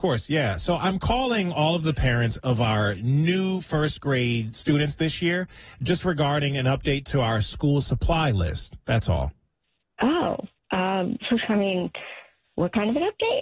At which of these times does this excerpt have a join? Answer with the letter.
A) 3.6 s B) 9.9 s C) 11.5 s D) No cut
D